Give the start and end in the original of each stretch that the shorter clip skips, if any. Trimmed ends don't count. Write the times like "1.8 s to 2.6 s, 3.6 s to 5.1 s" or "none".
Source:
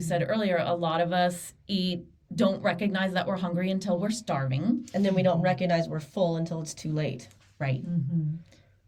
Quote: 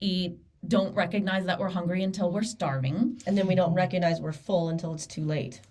none